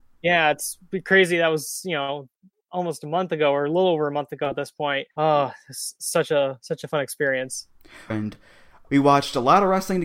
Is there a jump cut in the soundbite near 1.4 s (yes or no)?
no